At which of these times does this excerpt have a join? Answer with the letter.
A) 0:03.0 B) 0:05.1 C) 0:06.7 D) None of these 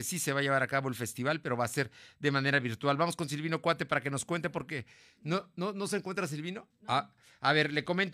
C